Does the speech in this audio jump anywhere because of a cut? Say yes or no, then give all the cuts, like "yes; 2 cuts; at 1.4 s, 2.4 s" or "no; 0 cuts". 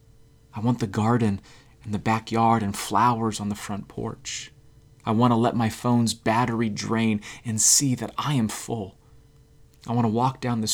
no; 0 cuts